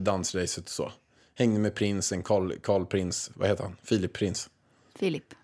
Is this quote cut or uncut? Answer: cut